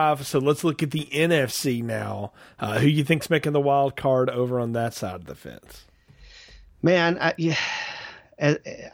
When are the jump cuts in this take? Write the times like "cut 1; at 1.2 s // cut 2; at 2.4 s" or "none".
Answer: none